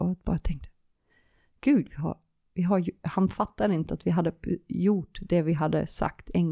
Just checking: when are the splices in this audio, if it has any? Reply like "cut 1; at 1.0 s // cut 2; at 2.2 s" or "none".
none